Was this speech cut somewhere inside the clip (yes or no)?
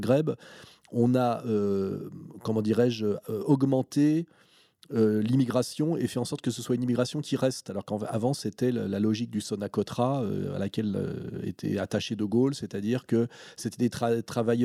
no